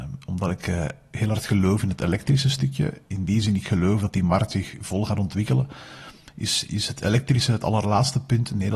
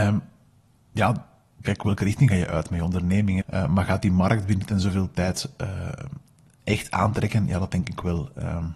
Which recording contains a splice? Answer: second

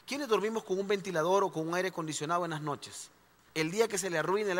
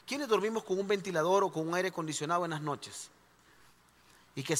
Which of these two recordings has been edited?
first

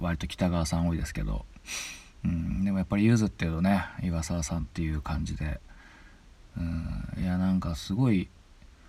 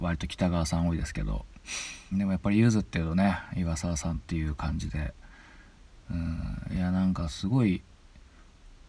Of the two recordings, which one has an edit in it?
second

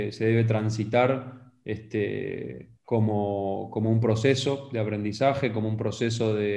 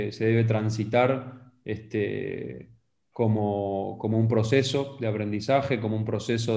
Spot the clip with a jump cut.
first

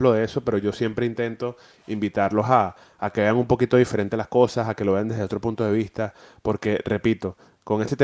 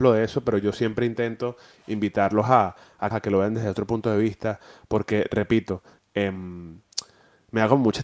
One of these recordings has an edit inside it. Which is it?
second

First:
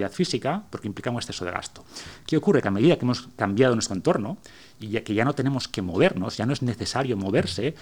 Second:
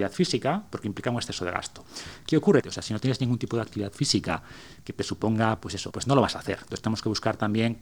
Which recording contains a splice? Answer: second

